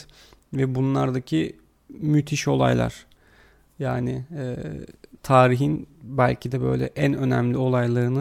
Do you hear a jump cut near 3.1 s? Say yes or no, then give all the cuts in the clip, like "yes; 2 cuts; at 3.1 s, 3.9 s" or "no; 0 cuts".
no; 0 cuts